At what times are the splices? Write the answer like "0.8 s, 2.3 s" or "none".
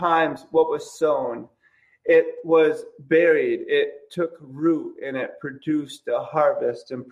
none

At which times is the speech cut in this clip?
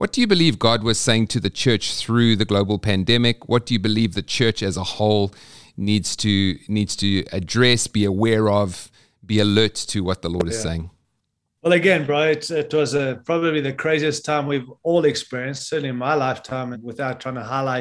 16.7 s

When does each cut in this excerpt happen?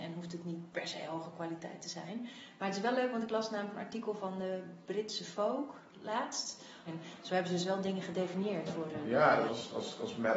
6.9 s, 9.5 s

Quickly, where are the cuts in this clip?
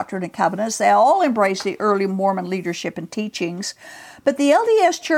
none

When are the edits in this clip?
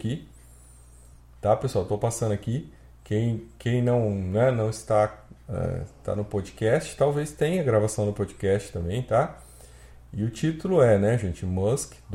none

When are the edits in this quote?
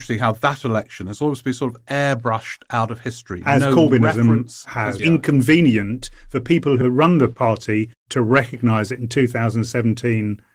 5.0 s, 6.8 s

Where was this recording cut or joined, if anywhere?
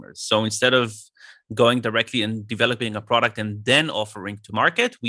none

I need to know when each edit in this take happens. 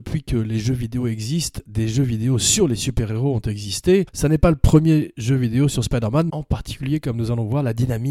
4.1 s, 6.3 s

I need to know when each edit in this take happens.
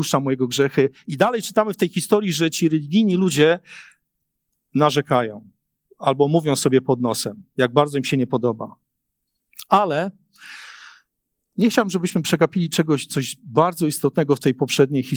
none

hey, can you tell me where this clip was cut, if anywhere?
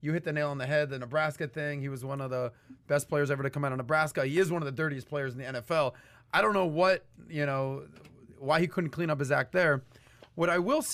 none

